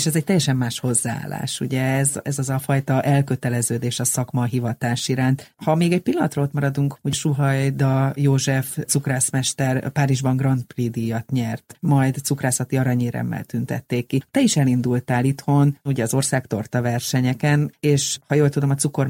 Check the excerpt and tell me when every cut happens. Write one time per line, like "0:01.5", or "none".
none

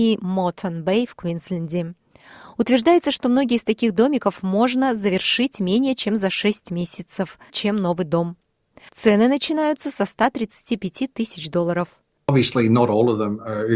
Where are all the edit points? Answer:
0:07.5
0:12.2

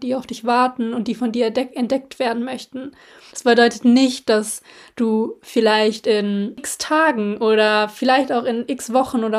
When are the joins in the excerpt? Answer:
0:03.3

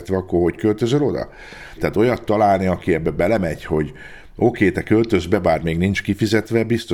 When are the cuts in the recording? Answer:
0:01.8

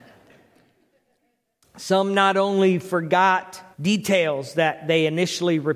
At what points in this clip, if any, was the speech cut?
0:01.6
0:03.7

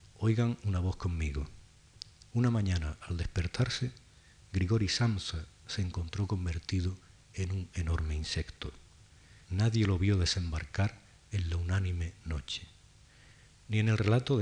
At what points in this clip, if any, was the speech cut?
0:09.4

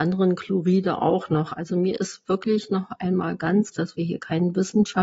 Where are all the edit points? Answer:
0:03.7

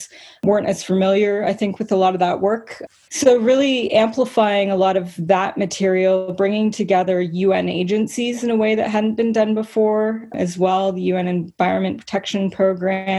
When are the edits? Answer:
0:03.1

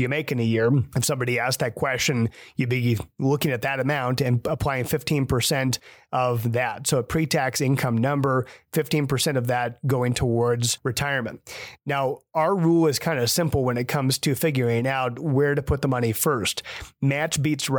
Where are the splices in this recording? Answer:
none

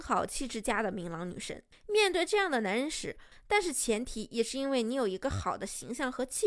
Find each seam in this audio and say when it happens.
0:01.7
0:03.3

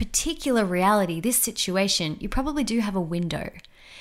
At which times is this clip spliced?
none

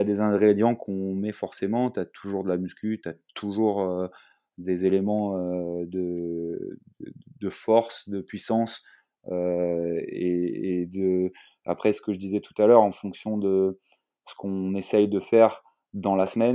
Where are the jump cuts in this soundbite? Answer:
none

